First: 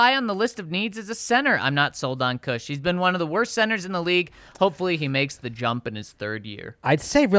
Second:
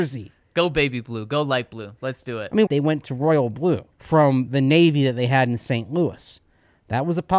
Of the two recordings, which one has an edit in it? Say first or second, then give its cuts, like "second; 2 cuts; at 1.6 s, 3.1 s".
second; 2 cuts; at 2.7 s, 3.9 s